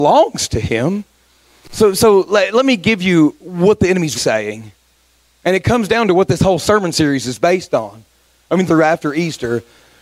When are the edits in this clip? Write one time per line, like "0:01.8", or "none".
0:04.1
0:08.7